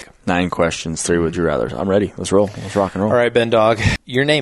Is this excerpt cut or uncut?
uncut